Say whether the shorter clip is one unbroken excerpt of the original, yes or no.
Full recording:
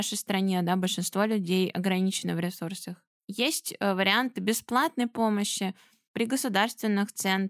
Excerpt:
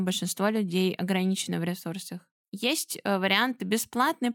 yes